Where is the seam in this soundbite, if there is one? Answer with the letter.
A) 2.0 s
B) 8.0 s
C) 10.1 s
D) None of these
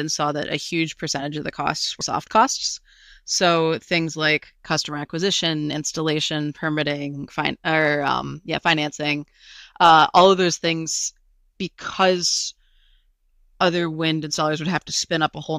A